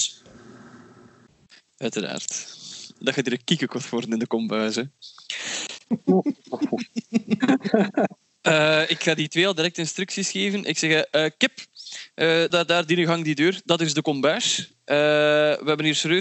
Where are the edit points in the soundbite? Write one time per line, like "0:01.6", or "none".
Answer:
0:12.5

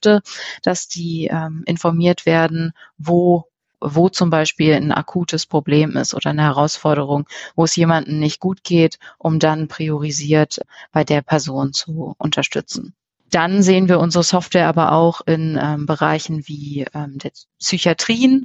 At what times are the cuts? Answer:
none

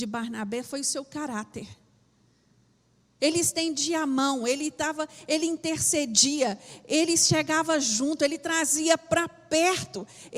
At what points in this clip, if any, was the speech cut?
0:03.2

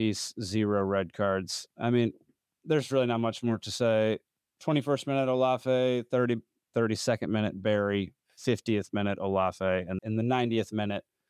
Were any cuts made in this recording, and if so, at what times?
0:06.7
0:10.0

